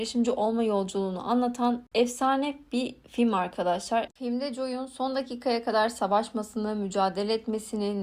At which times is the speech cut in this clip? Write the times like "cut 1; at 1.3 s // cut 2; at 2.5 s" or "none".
cut 1; at 4.1 s